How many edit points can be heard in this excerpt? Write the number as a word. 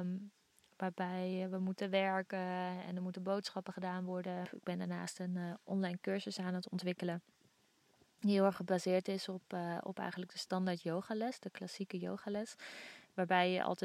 one